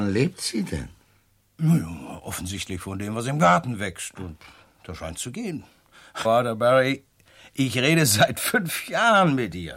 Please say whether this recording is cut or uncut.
cut